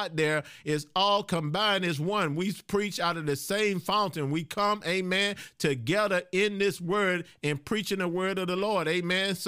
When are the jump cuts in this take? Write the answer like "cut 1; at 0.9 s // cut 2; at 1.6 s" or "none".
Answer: none